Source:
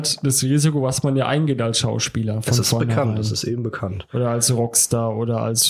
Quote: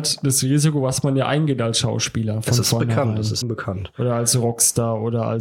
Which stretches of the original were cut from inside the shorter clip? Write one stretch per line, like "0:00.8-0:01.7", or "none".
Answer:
0:03.4-0:03.6